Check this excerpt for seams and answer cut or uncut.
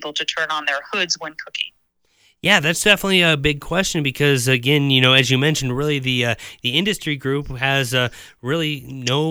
uncut